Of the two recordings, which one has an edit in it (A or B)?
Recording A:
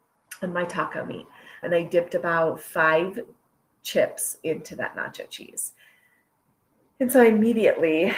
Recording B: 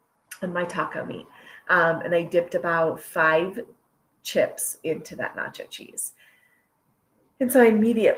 A